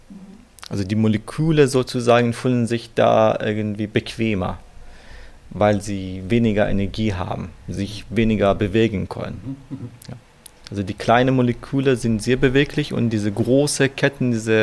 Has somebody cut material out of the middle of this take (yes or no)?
no